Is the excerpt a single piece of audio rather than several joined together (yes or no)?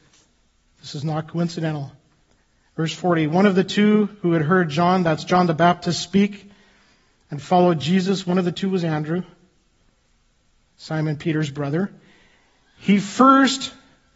yes